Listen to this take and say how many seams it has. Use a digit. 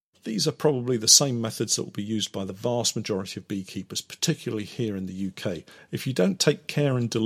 1